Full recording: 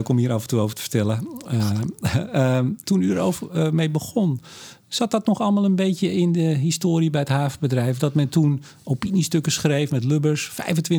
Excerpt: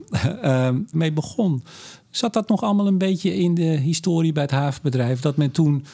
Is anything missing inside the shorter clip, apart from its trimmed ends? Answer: yes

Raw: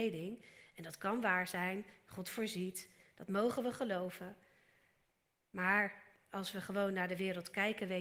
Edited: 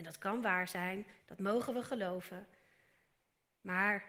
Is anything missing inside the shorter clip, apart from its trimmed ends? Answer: yes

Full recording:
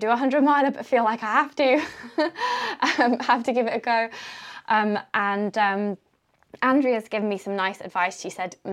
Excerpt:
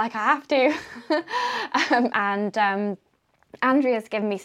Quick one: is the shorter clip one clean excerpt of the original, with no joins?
no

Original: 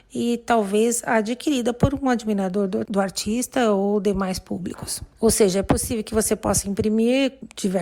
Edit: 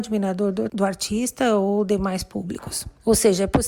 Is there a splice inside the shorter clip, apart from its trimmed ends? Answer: no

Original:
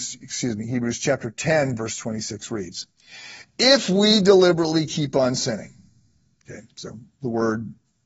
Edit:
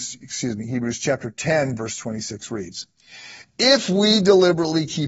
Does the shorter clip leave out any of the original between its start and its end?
no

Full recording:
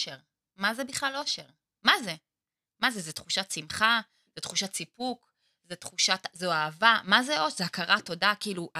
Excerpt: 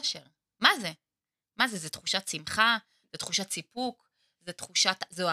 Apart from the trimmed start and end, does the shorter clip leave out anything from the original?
no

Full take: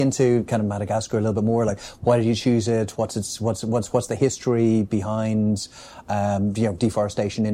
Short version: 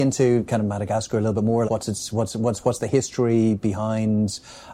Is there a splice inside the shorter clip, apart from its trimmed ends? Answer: yes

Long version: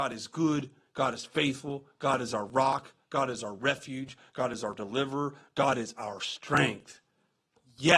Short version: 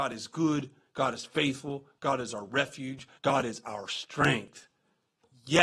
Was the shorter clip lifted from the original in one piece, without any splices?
no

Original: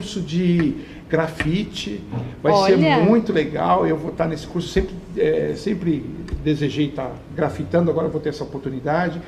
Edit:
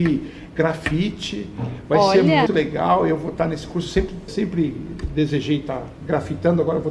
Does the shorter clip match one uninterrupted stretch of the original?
no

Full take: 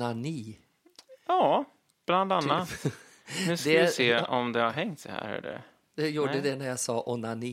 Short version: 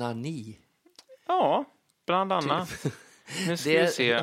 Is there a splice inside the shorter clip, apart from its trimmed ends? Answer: no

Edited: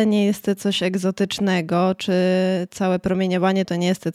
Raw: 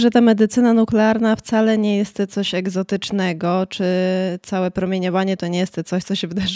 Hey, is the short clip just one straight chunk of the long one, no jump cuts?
yes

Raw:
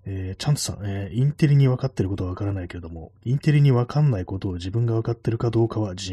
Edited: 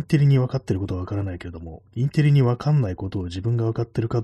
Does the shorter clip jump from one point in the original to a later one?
no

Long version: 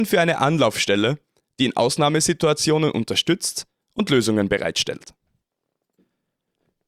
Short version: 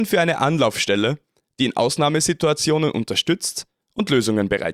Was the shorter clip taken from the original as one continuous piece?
yes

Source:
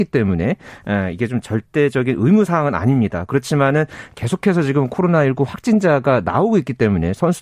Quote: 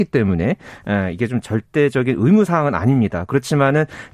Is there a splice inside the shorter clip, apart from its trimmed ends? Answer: no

